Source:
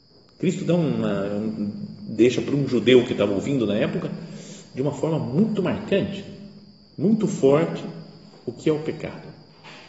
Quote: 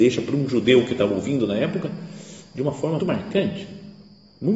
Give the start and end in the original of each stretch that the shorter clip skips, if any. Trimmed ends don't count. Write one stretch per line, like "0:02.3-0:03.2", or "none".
0:05.2-0:05.6